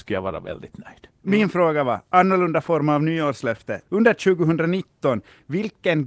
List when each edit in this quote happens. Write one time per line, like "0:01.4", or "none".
0:01.2
0:03.9